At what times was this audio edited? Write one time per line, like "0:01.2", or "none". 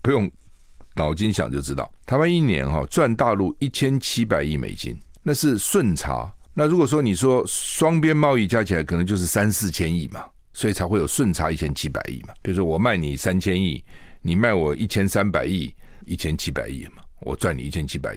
0:12.4
0:16.0